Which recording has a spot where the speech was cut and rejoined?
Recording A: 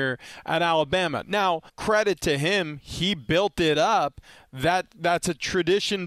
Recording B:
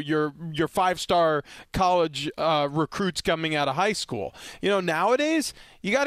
A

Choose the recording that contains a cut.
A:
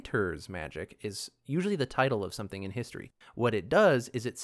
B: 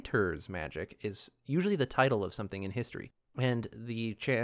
A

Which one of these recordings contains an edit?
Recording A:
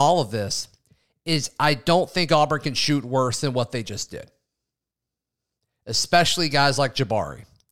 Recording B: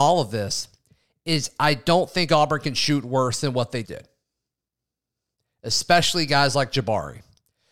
B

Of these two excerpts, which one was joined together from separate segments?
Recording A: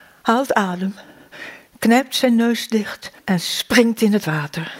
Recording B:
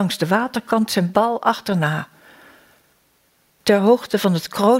A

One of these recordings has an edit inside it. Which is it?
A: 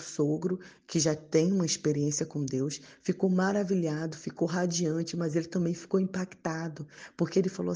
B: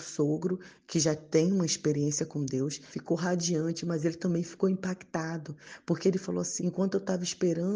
B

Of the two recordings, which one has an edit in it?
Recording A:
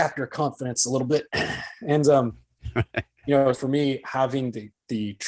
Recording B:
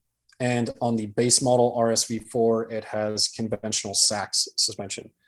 A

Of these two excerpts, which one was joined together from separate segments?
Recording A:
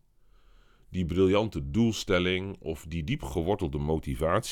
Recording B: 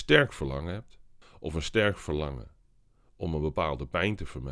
B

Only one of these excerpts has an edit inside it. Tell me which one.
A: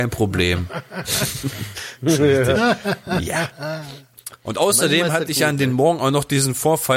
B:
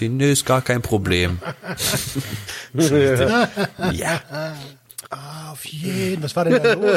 B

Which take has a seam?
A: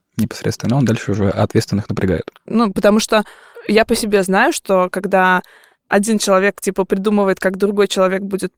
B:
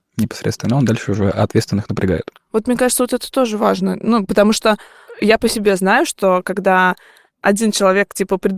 A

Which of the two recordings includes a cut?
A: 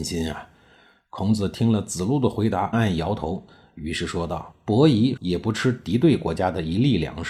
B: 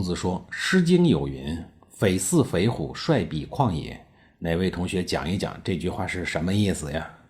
A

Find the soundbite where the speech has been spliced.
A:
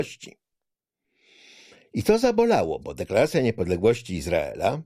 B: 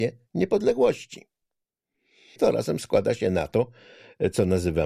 B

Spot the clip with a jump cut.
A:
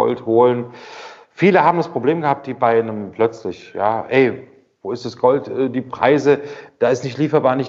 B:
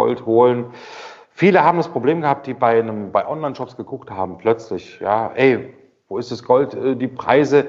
A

